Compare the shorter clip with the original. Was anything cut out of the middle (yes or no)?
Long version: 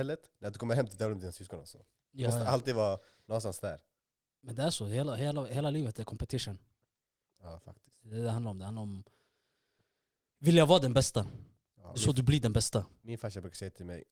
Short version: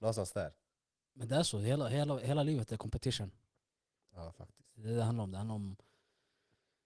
no